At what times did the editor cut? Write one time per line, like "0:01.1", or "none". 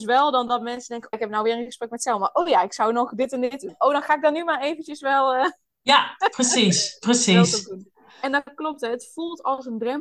0:01.1